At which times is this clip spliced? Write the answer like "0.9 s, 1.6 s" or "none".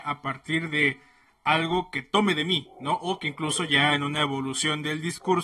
none